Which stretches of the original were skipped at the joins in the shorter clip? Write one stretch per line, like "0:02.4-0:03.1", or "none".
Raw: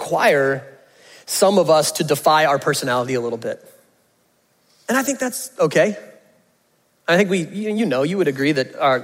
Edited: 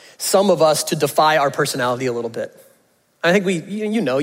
0:04.1-0:06.9